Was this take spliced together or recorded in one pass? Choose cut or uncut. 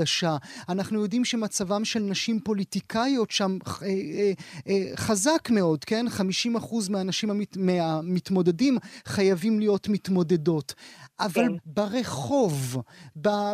cut